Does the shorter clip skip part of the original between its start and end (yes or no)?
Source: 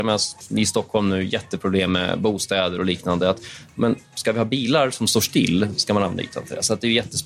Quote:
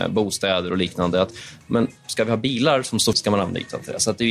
yes